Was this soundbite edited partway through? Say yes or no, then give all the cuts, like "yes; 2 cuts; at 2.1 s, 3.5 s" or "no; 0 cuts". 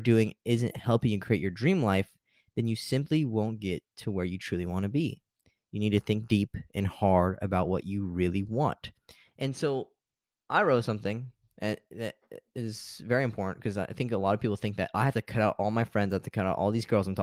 yes; 1 cut; at 9.3 s